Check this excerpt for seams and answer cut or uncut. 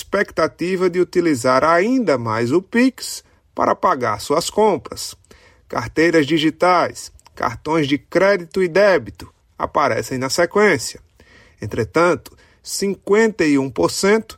uncut